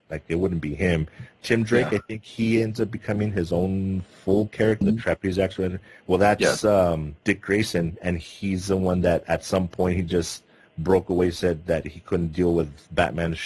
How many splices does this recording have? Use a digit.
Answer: 1